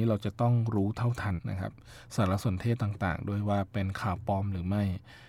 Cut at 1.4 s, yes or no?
yes